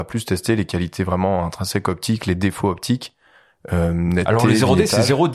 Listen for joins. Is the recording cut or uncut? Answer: uncut